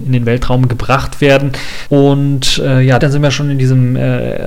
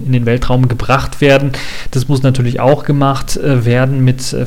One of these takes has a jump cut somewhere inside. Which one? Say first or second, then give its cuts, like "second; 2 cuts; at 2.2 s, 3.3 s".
first; 2 cuts; at 1.9 s, 3.0 s